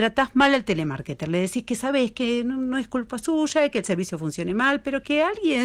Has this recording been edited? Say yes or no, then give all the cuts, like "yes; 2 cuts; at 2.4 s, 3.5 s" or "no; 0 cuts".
no; 0 cuts